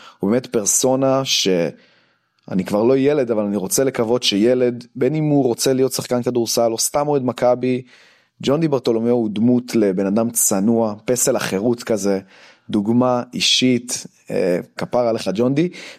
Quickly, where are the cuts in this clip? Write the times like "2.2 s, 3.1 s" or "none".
14.8 s